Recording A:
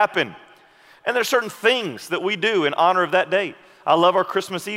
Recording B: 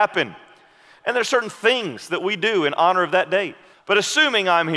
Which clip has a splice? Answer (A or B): B